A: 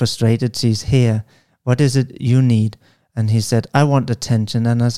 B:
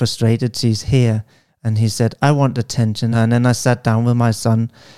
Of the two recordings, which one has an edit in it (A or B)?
B